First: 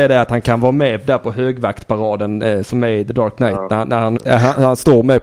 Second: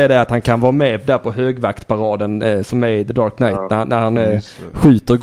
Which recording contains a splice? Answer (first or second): first